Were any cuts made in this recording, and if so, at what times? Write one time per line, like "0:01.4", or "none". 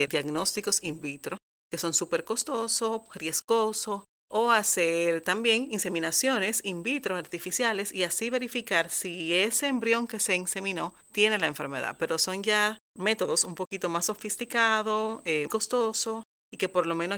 0:11.0
0:15.5